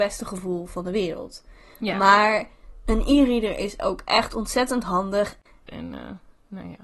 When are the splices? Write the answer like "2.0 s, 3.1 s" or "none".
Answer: 5.7 s